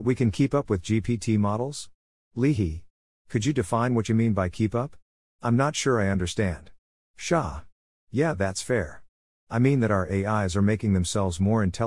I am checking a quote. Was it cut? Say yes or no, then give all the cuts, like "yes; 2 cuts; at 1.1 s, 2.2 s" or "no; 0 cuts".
no; 0 cuts